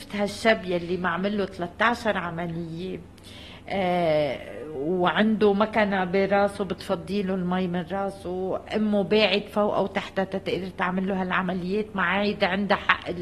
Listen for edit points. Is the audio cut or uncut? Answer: uncut